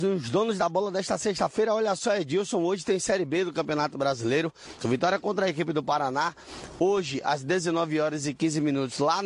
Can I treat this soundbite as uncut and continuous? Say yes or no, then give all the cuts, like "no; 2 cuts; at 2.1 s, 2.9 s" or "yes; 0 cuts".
no; 1 cut; at 4.8 s